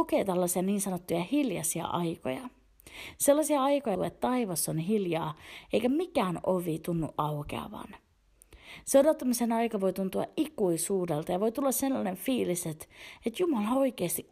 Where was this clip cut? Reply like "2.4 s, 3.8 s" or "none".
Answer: 4.0 s